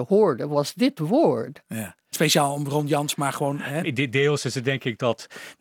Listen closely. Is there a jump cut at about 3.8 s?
yes; 2 cuts; at 2.1 s, 3.8 s

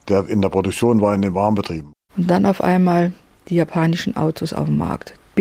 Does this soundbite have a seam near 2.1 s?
yes; 1 cut; at 2.1 s

